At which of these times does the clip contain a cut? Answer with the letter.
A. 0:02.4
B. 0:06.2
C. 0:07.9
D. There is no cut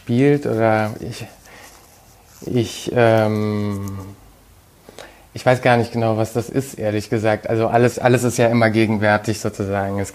C